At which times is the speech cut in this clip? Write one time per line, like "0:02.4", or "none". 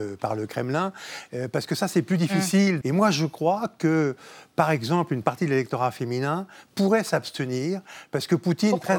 0:01.3
0:02.8